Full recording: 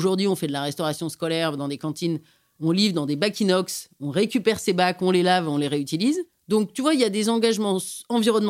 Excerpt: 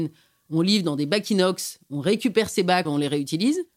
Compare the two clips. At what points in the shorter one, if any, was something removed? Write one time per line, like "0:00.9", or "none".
0:02.8